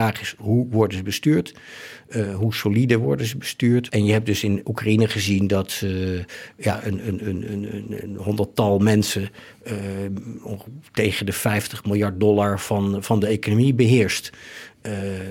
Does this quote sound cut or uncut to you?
cut